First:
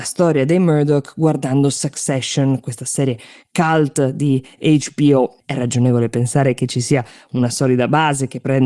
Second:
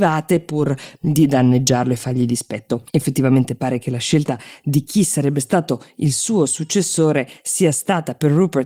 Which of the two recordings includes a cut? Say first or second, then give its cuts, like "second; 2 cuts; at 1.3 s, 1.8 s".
first; 1 cut; at 5.4 s